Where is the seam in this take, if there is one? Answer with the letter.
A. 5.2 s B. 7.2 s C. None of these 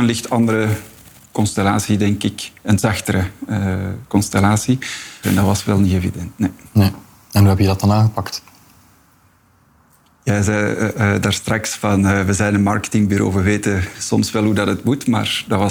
A